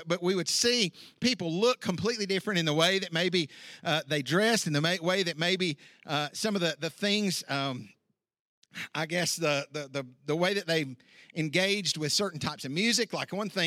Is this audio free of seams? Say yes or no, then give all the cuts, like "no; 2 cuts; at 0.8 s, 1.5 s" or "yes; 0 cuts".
yes; 0 cuts